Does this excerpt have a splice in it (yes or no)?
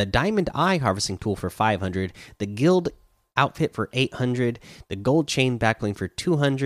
no